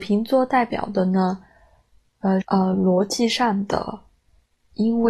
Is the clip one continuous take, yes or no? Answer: no